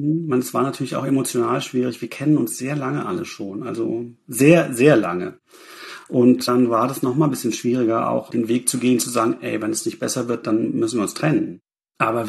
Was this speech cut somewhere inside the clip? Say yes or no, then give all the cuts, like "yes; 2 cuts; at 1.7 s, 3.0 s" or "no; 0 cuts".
no; 0 cuts